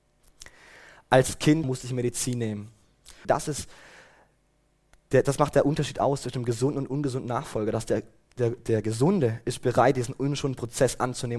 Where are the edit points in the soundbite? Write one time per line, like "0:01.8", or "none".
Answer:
0:01.6
0:03.2